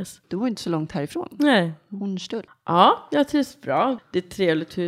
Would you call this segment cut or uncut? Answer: cut